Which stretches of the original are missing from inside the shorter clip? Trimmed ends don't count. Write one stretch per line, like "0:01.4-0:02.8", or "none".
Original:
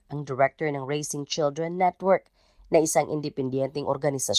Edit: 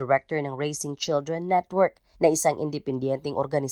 0:02.4-0:02.6